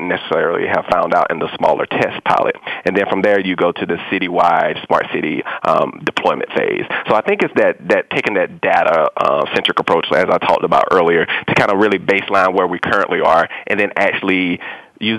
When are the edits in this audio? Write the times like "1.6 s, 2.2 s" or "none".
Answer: none